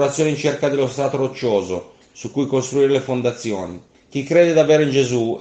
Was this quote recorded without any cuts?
no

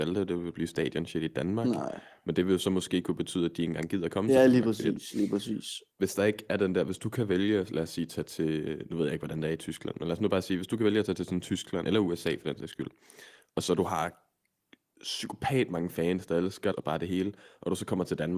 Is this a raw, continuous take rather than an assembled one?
no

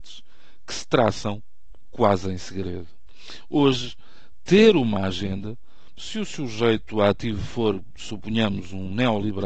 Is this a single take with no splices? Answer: yes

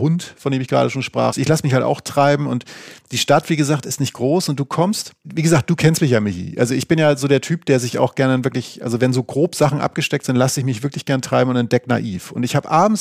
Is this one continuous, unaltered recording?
no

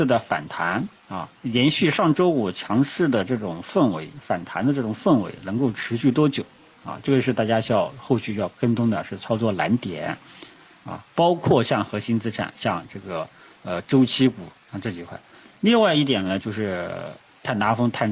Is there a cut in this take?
yes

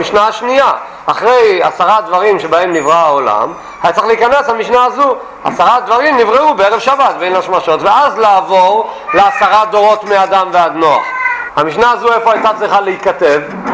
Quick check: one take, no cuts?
no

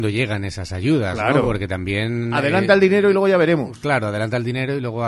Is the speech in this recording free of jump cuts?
yes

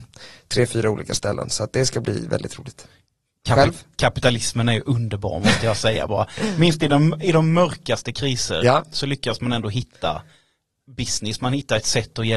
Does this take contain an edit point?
no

